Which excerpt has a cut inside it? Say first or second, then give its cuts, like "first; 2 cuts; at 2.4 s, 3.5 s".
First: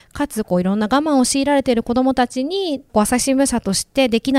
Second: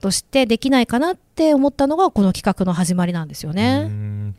first; 1 cut; at 2.9 s